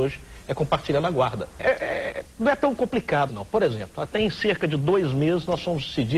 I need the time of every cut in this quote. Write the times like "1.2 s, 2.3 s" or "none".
1.6 s, 3.3 s